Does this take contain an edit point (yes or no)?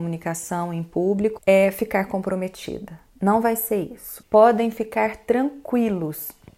yes